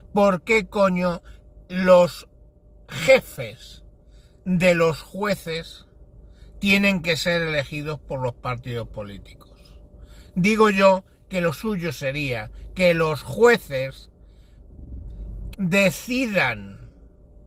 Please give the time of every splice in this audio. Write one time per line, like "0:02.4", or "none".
0:15.5

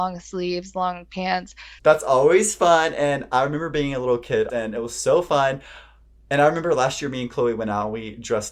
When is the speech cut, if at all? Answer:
0:01.8
0:04.5

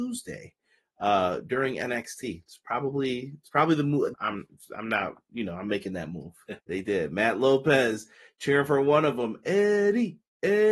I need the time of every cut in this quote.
0:04.1
0:06.6

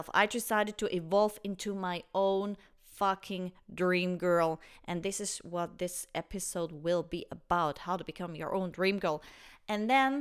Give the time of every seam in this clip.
none

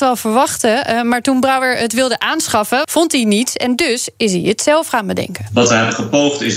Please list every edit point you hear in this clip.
0:02.8

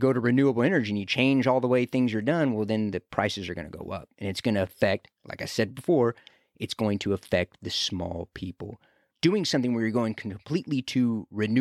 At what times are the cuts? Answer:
0:09.1

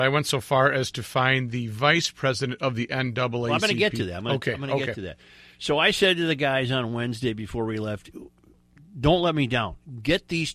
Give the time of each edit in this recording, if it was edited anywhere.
none

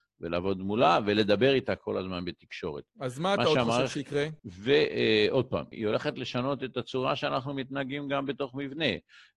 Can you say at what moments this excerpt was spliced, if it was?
0:04.4
0:05.7

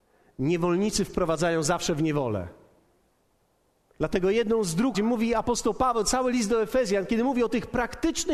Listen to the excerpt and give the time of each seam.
0:03.9
0:04.9

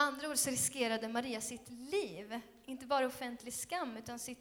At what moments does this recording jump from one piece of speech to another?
none

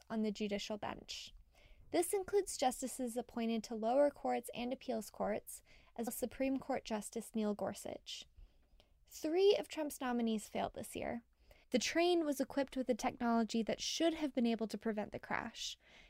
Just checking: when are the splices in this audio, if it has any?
0:06.1
0:11.6

